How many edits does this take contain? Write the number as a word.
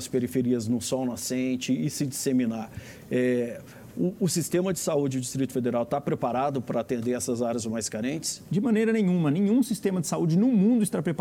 zero